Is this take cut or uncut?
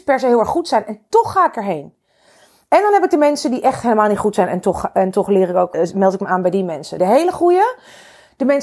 cut